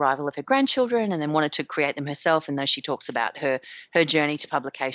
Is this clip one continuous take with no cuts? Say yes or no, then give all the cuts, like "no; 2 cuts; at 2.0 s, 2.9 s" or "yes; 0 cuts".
yes; 0 cuts